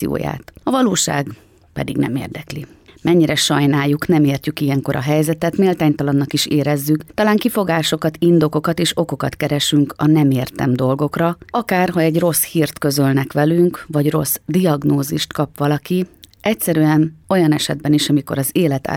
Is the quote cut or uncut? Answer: uncut